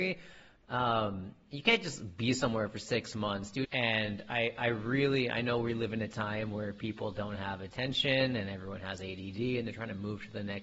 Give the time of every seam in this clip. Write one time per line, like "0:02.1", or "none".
0:03.6